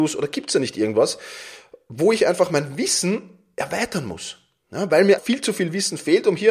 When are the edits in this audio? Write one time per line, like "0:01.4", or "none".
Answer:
0:05.2